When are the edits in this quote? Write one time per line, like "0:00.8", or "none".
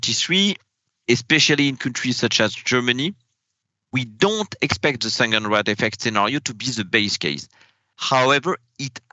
none